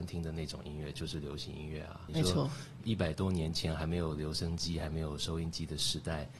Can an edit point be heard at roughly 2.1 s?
yes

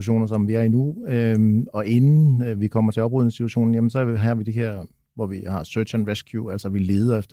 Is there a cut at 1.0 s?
no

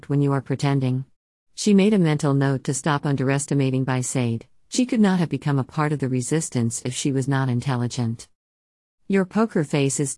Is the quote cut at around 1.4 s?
yes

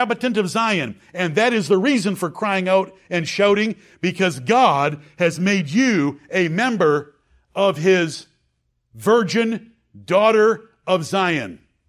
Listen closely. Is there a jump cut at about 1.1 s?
no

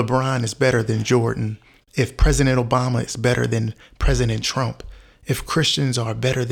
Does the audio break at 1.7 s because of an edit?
no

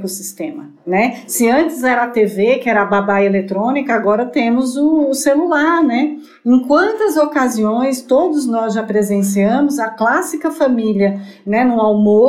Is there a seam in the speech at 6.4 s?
no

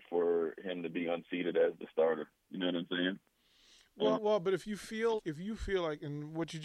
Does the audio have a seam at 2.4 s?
no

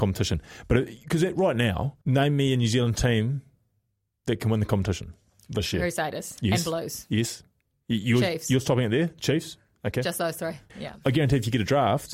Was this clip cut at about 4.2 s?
no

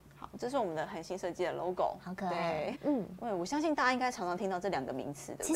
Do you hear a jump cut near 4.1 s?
no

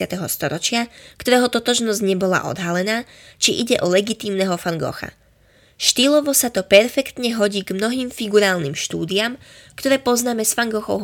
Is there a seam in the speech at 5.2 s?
no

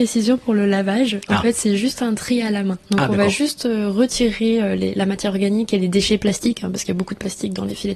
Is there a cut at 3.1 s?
no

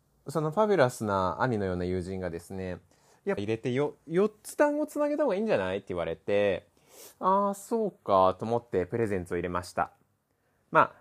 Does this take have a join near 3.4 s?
yes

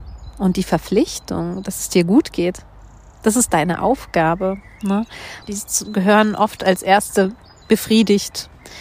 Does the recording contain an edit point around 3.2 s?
no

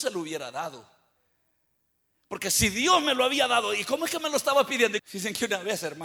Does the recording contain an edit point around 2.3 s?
no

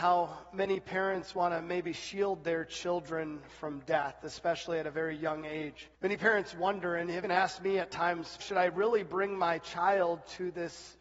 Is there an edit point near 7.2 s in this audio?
yes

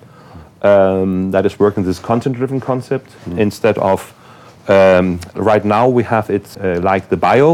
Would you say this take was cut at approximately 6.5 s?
yes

